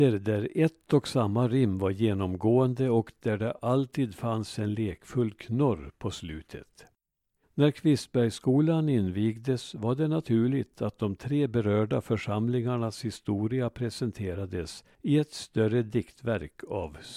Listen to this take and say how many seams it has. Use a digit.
1